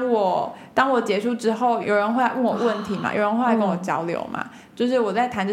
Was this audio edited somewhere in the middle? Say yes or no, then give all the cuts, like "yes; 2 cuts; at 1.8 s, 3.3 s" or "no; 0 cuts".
yes; 1 cut; at 1.8 s